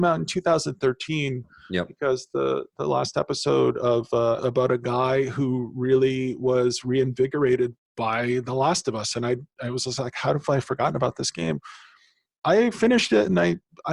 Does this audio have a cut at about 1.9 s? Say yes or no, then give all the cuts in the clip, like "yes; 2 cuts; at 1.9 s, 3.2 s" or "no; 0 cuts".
no; 1 cut; at 4.4 s